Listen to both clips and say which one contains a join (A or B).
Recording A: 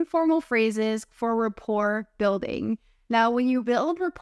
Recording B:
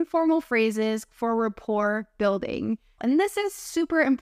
B